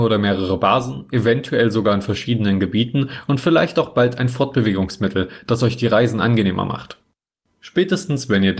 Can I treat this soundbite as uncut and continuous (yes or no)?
yes